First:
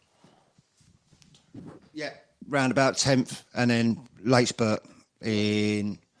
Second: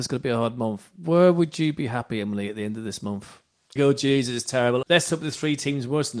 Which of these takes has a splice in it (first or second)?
second